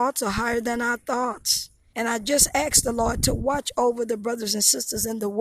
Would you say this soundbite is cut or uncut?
cut